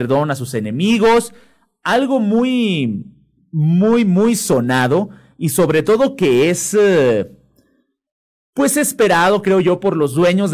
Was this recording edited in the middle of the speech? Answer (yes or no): no